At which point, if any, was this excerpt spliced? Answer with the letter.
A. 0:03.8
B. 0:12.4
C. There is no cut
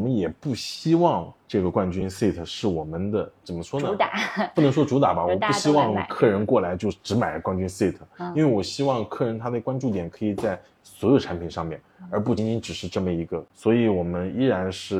B